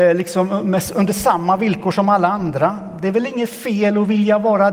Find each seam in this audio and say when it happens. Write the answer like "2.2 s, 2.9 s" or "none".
none